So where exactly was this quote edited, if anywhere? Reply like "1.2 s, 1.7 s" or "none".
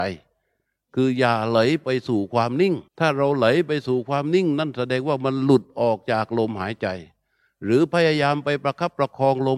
2.9 s